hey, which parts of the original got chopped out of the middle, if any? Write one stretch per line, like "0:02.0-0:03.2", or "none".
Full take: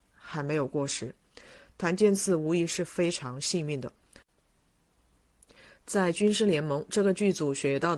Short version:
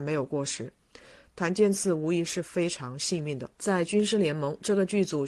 0:04.0-0:05.8